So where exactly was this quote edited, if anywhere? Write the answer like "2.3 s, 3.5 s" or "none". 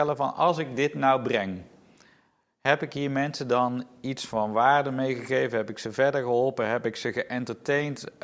none